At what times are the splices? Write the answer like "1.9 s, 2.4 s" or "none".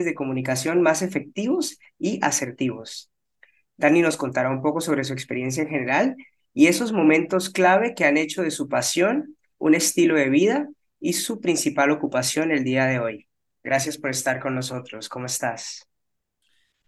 13.6 s